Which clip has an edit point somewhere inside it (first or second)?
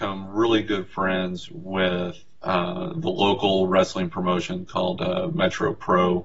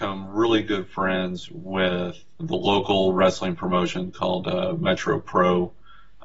second